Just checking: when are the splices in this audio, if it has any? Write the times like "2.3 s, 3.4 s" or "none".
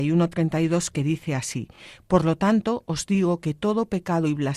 none